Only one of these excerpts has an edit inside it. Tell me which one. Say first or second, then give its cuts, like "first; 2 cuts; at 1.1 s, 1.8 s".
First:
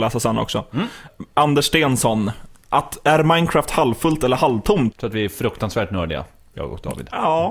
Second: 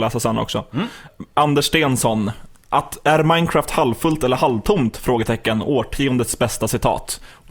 first; 1 cut; at 4.9 s